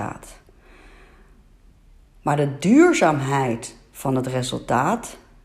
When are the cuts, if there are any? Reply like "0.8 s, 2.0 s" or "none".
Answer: none